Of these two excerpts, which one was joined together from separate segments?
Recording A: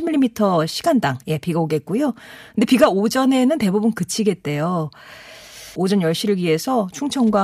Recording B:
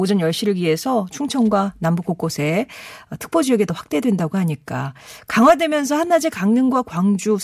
A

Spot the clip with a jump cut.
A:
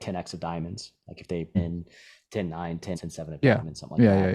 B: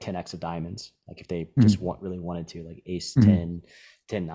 A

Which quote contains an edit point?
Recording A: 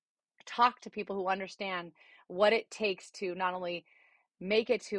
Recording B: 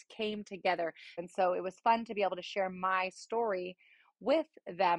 B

